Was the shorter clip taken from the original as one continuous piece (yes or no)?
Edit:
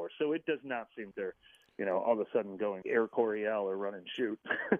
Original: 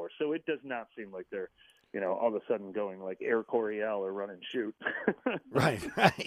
no